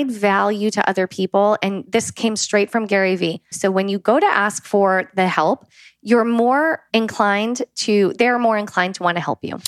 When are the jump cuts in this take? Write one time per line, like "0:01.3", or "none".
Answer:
0:03.5
0:06.9